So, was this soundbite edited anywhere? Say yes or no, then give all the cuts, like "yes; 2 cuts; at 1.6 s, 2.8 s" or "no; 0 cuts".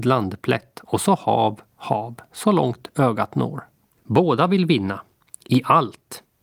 yes; 2 cuts; at 1.7 s, 4.0 s